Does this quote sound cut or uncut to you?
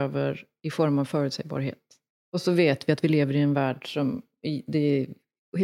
uncut